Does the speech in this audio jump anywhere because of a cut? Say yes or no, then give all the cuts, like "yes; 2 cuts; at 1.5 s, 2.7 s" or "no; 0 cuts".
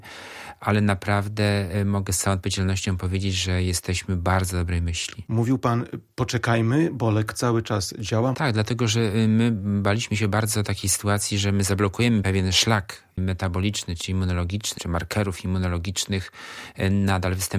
yes; 2 cuts; at 8.3 s, 14.8 s